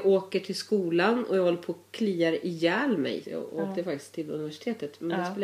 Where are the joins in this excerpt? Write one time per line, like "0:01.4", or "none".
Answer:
0:03.2